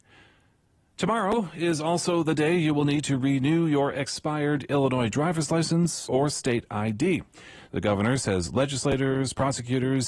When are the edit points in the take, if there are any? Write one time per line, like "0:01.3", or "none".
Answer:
0:06.0
0:07.7